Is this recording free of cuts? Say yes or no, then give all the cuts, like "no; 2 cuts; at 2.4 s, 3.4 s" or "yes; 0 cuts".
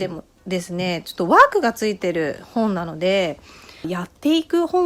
no; 1 cut; at 3.8 s